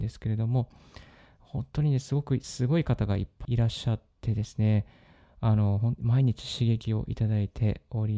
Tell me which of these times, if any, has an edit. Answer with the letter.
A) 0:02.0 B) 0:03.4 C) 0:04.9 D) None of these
B